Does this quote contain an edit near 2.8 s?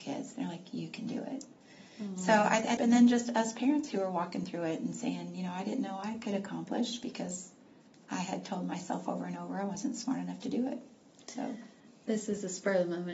yes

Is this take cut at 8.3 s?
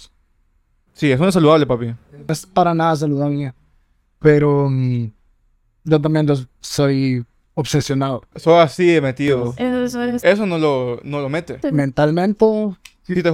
yes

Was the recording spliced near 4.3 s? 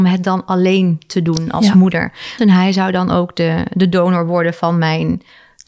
no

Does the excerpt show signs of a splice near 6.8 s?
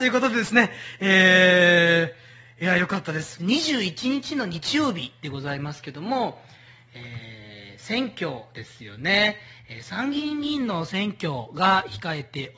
no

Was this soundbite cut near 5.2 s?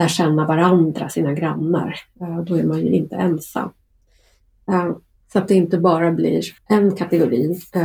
yes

